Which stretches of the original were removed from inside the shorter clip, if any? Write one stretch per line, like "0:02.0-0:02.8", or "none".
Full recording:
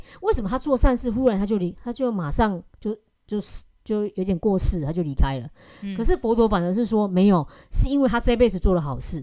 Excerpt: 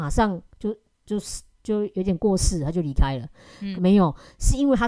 0:06.0-0:07.1